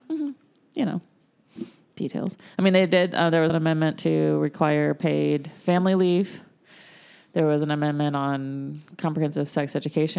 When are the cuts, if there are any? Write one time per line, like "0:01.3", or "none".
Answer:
0:03.5